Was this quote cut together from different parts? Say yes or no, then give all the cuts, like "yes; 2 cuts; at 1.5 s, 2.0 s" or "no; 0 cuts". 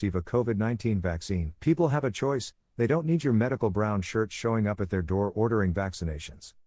yes; 1 cut; at 1.6 s